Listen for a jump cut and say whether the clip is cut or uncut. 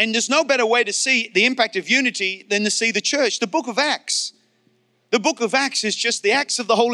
uncut